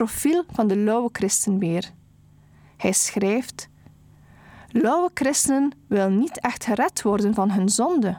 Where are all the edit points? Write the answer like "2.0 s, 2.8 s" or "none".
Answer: none